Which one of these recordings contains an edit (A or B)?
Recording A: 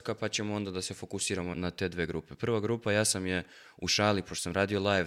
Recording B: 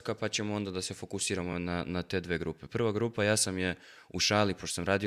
A